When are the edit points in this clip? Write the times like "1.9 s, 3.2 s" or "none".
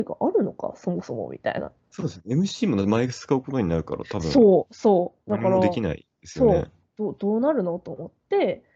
none